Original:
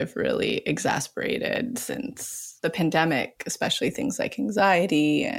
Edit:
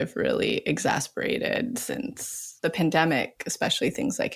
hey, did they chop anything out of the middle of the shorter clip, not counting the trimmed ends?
no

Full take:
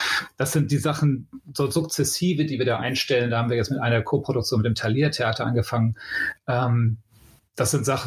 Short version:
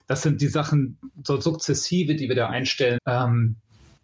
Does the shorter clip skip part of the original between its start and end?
yes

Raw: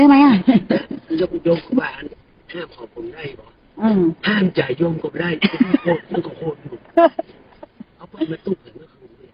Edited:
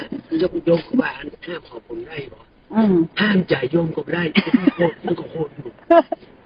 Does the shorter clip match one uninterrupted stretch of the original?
no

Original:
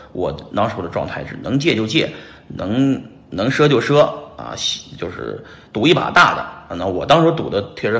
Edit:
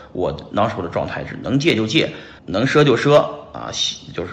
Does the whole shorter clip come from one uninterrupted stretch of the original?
no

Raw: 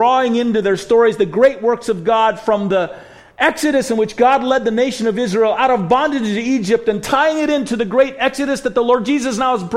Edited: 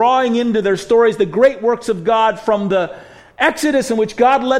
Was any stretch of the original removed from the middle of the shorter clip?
no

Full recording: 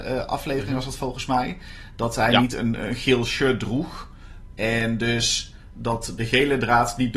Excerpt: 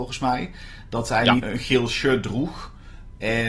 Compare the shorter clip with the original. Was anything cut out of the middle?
yes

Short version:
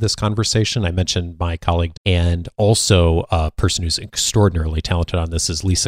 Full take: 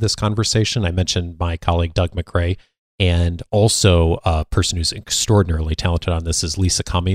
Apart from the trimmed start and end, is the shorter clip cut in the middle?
yes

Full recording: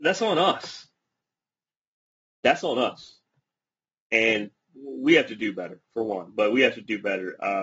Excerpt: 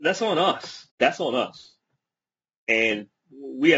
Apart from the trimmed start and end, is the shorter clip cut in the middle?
yes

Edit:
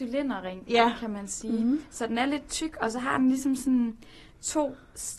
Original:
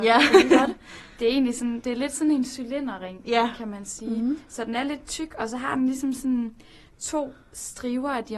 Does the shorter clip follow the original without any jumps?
yes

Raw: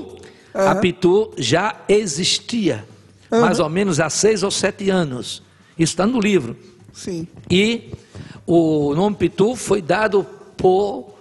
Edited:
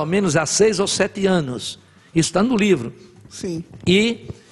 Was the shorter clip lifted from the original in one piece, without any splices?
yes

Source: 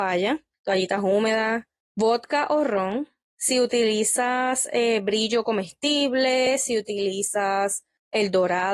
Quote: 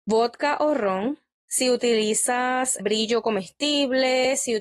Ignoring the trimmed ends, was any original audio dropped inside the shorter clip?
yes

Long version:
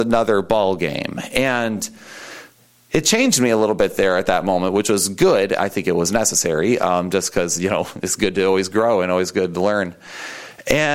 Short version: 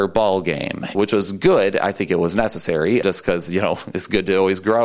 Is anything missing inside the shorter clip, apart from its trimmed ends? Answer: yes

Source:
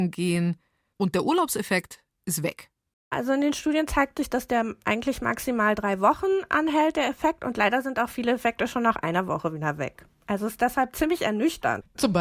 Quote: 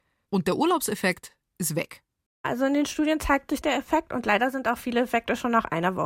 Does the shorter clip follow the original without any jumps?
no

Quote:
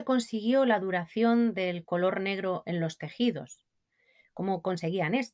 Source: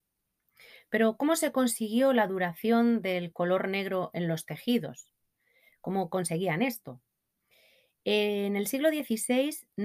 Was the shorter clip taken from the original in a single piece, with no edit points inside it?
yes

